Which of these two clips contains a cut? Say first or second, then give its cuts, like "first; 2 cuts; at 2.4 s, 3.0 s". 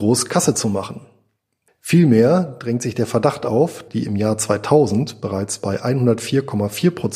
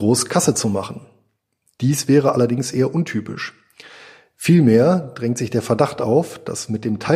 first; 2 cuts; at 1.7 s, 3.9 s